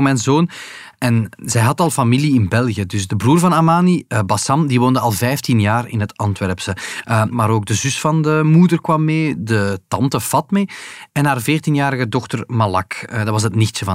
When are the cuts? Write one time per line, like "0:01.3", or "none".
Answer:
0:07.3